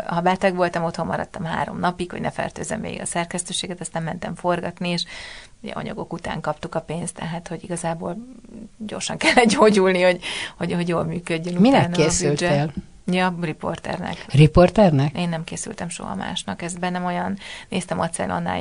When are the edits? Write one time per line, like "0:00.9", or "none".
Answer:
none